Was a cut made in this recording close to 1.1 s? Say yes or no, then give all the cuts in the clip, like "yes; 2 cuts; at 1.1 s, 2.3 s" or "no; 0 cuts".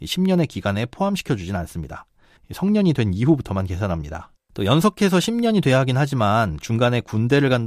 no; 2 cuts; at 2.4 s, 4.4 s